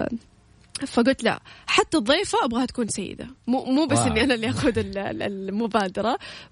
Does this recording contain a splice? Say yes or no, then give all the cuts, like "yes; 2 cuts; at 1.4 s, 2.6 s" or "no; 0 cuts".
yes; 1 cut; at 3.4 s